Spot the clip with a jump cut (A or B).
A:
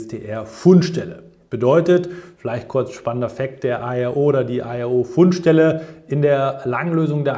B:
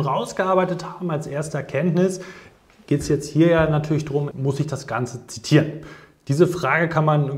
B